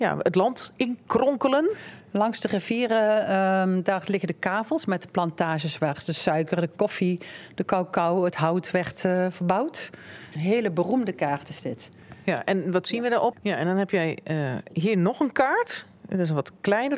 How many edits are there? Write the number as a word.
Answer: two